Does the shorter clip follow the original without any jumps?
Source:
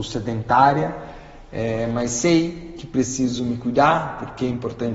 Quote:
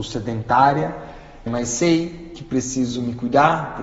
no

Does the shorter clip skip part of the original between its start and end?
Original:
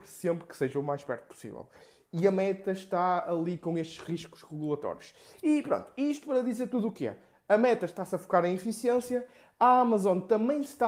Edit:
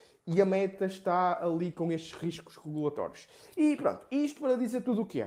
no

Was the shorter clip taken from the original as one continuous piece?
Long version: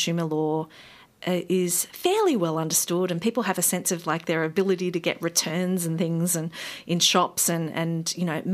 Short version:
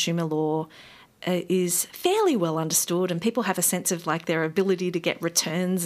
yes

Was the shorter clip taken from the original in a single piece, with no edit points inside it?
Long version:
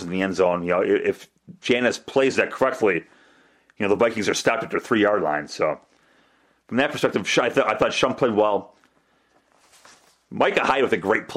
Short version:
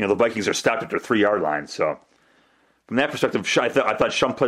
yes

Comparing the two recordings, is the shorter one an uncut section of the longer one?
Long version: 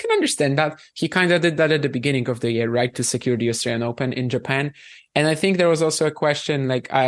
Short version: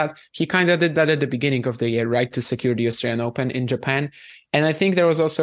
yes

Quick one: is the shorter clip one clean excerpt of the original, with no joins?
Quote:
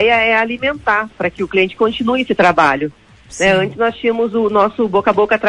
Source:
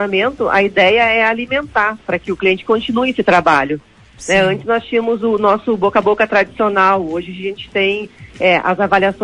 yes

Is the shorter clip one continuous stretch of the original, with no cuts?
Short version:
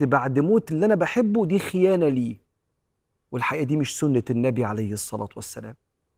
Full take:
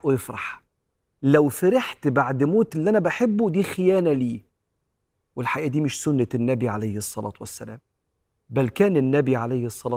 yes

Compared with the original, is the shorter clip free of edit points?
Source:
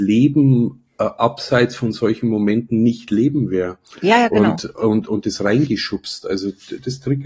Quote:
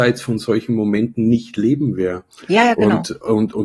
yes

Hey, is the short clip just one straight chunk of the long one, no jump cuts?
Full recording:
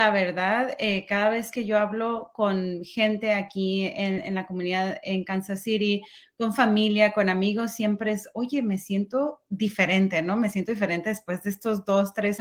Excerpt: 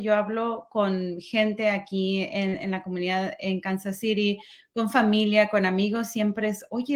yes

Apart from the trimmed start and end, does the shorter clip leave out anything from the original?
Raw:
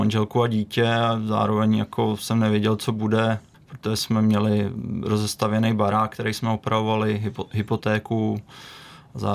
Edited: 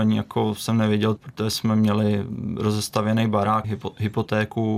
yes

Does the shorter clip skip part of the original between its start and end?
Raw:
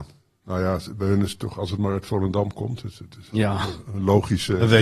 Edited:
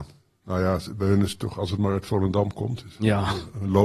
yes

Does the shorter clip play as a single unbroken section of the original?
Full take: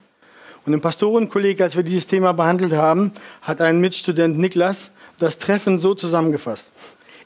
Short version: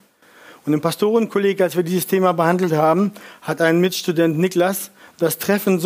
yes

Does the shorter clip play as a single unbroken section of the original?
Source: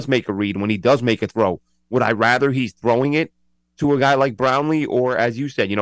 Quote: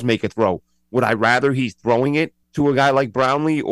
no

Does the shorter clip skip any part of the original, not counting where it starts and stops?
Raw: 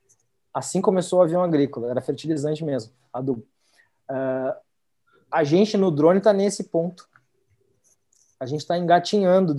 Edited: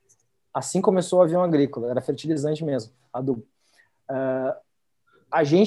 no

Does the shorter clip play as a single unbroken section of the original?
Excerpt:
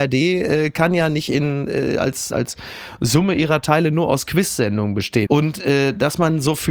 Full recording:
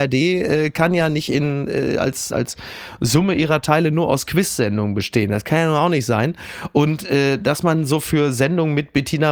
no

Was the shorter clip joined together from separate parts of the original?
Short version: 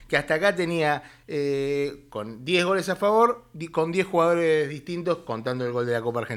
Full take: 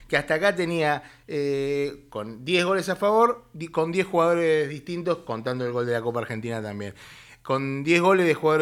no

